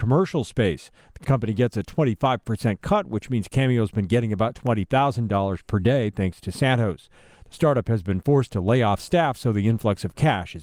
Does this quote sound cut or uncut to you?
cut